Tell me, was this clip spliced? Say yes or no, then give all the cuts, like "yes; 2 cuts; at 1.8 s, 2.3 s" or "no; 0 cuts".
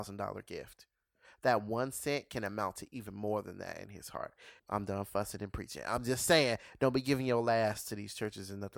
yes; 1 cut; at 4.6 s